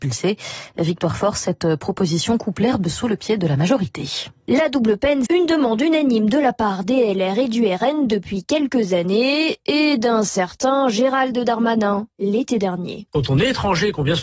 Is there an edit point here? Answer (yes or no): yes